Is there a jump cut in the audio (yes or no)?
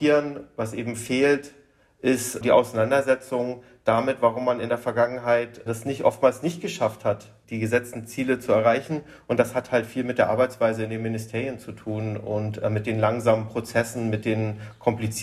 no